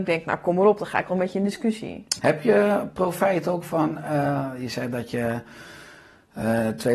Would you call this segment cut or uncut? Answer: cut